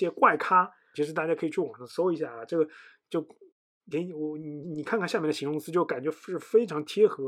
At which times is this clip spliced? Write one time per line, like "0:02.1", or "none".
0:00.9